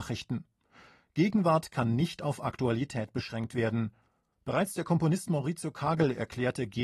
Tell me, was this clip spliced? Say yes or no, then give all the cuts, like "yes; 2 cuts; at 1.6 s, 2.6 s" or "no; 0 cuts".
no; 0 cuts